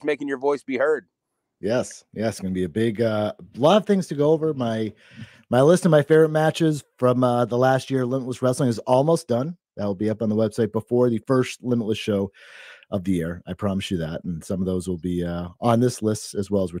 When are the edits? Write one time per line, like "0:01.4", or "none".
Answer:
none